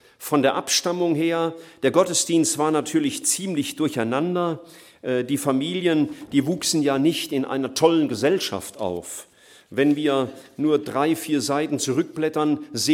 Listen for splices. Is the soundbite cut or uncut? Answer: uncut